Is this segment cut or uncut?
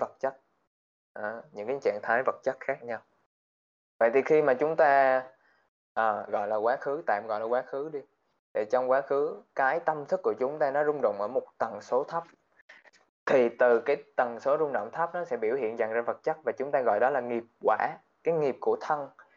cut